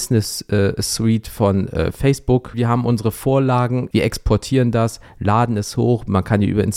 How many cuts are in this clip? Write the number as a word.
two